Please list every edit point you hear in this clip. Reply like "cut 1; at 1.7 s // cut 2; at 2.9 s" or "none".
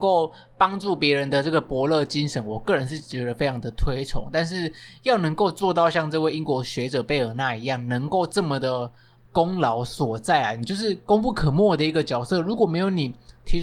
cut 1; at 9.2 s

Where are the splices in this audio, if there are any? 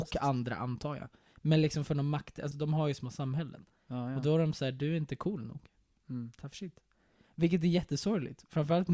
cut 1; at 2.5 s

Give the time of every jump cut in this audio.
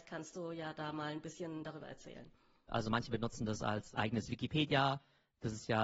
cut 1; at 2.7 s // cut 2; at 3.9 s

